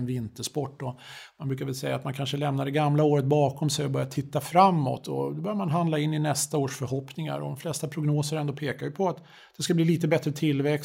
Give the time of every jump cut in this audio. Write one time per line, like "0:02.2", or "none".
none